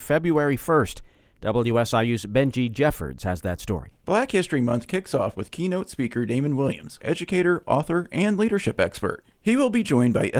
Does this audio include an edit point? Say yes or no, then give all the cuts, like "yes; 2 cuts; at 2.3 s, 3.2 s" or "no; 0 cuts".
yes; 1 cut; at 7.0 s